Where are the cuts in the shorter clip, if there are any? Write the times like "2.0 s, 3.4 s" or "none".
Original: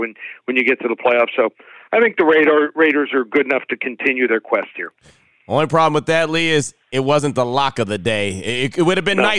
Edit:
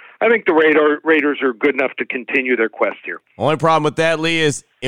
3.3 s